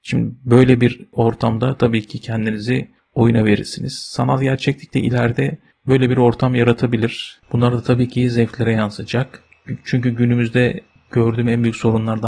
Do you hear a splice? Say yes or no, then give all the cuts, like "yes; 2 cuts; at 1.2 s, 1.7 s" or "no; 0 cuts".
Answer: yes; 1 cut; at 7.4 s